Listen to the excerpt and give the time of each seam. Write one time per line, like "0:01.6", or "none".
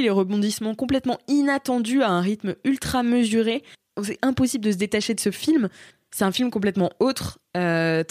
none